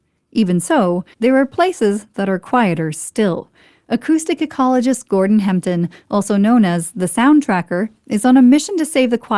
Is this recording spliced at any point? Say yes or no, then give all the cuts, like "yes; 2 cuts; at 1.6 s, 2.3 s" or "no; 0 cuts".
yes; 1 cut; at 1.1 s